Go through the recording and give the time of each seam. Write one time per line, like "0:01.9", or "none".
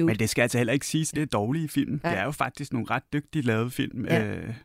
0:01.1